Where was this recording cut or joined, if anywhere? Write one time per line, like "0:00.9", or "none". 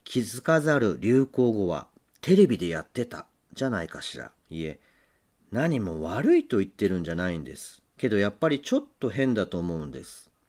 0:04.4
0:07.9